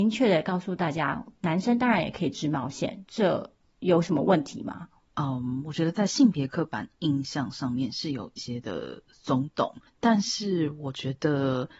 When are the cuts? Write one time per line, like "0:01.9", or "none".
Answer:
0:05.0
0:08.4